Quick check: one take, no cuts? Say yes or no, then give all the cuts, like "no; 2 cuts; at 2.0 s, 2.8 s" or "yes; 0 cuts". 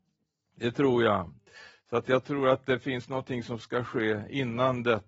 yes; 0 cuts